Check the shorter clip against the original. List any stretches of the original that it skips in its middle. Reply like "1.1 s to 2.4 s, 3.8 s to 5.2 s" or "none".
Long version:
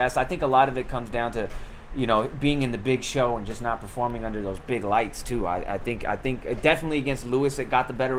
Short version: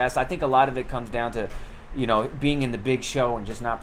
none